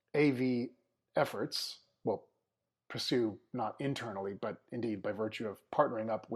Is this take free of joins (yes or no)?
yes